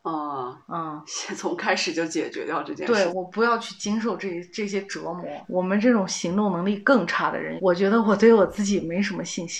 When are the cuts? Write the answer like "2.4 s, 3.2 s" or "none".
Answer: 3.1 s, 5.4 s, 7.6 s